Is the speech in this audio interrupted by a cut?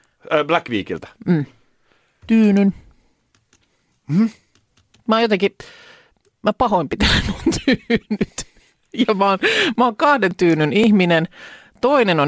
no; 0 cuts

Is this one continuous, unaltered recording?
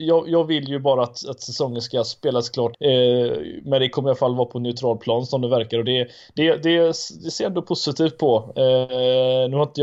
no; 1 cut; at 2.7 s

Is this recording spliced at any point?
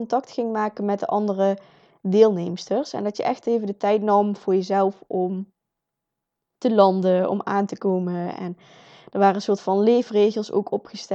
no; 0 cuts

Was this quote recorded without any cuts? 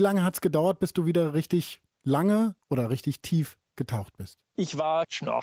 yes; 0 cuts

